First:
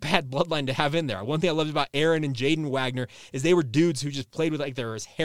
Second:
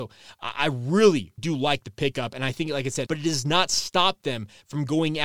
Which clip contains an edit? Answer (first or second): second